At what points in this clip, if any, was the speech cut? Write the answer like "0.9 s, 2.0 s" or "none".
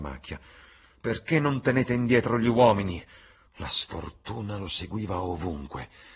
3.5 s